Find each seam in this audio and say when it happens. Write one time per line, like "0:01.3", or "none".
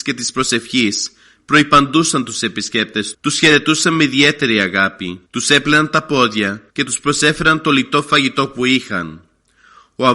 0:03.1
0:05.3
0:06.7

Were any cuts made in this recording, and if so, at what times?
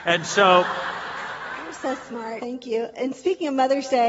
0:02.4

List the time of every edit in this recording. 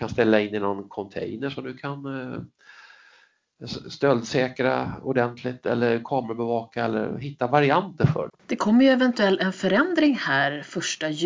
0:08.3

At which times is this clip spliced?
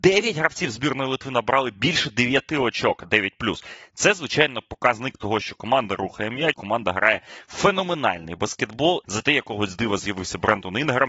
0:06.5
0:09.0

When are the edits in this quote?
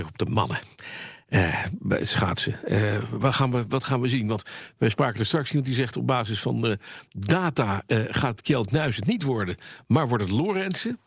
none

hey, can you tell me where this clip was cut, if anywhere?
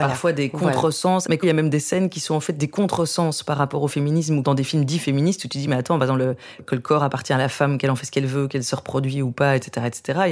0:01.3

